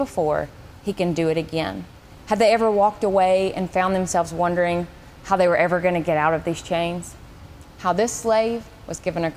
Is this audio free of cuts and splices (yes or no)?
no